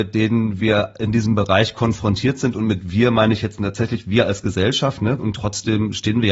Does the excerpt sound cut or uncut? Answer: cut